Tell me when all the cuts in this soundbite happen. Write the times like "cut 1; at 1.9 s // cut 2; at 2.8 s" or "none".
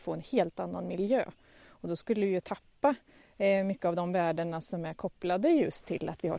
none